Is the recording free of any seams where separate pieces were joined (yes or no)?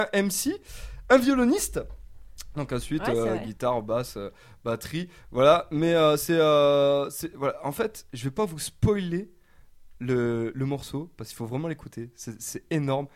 yes